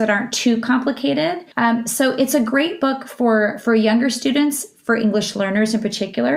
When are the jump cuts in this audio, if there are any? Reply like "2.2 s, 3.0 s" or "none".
1.5 s